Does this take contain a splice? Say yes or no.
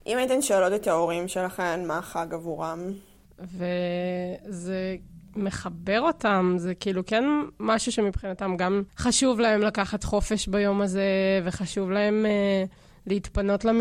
yes